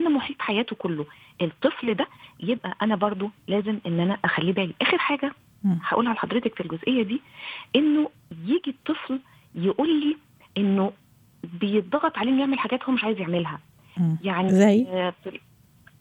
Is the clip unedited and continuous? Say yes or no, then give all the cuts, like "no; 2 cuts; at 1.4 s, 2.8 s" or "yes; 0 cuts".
yes; 0 cuts